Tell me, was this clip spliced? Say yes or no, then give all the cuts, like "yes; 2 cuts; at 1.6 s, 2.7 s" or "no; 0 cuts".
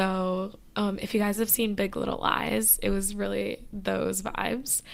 no; 0 cuts